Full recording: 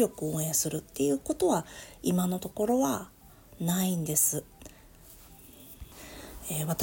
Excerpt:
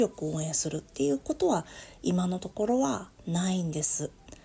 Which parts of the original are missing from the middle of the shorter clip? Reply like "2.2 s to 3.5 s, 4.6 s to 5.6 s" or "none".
3.2 s to 3.5 s